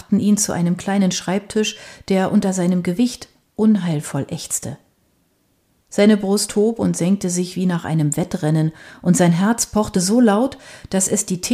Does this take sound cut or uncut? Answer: uncut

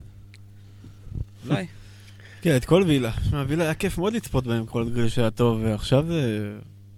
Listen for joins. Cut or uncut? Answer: uncut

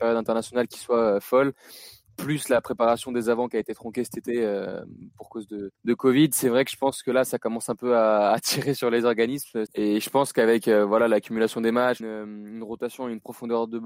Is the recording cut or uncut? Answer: cut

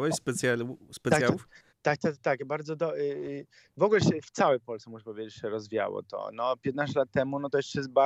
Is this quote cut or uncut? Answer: uncut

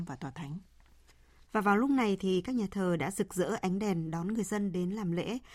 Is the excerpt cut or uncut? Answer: cut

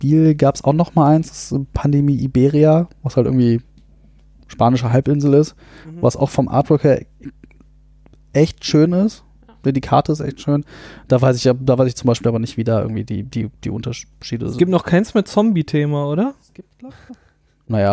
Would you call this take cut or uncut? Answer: uncut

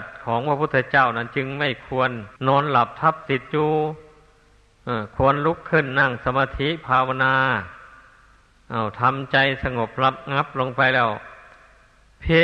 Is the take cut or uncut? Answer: cut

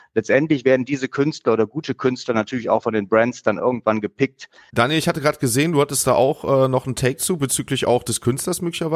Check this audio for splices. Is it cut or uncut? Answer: cut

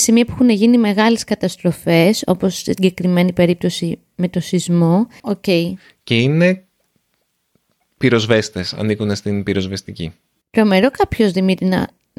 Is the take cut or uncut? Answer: cut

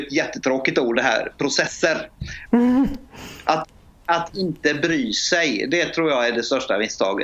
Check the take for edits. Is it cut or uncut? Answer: cut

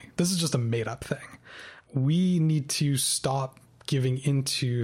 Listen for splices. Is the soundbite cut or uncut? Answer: uncut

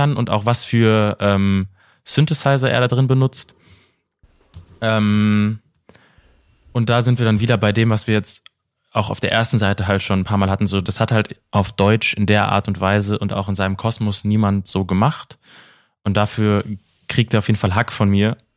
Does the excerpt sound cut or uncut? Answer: uncut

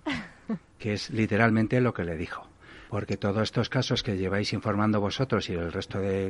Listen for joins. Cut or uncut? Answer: cut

